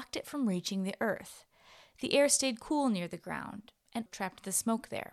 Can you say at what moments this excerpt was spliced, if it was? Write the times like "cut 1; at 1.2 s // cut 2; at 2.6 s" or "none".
cut 1; at 4.1 s